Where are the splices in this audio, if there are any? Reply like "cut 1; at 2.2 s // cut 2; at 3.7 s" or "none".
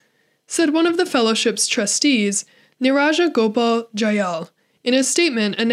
none